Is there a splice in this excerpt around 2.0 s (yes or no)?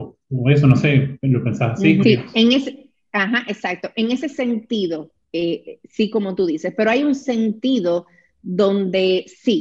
yes